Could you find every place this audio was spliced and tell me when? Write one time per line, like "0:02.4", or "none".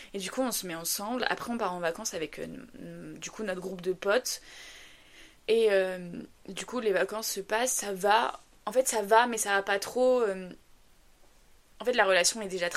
0:05.4